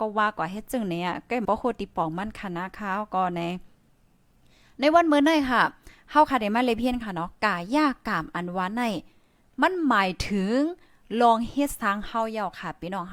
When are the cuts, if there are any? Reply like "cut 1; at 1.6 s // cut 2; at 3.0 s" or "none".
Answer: cut 1; at 1.4 s